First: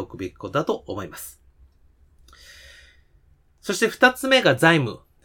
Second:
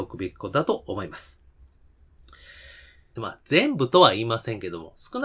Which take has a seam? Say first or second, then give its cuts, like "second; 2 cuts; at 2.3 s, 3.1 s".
second; 1 cut; at 3.2 s